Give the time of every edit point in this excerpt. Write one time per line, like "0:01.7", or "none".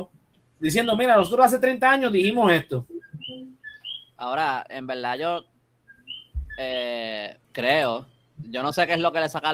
0:07.4